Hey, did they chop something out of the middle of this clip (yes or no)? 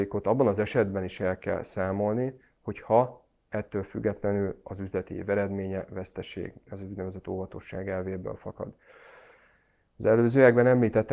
no